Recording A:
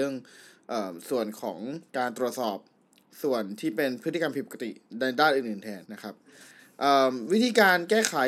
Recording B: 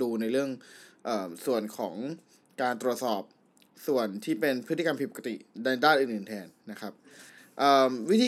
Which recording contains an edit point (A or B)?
A